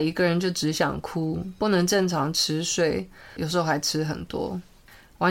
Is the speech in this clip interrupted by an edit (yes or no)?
yes